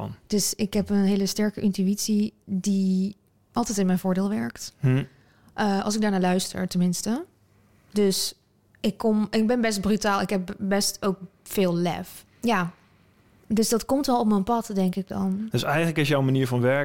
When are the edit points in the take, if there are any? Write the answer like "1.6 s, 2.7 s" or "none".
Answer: 12.3 s